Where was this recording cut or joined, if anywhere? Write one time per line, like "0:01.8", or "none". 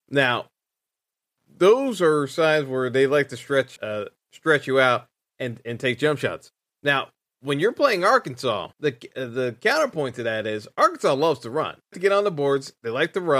0:03.8
0:08.7
0:11.9